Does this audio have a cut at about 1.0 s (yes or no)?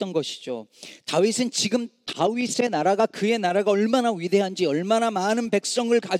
no